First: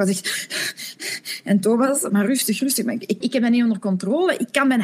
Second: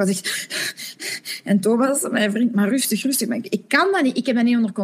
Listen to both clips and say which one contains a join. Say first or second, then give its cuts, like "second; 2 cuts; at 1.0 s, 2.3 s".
first; 2 cuts; at 2.1 s, 3.2 s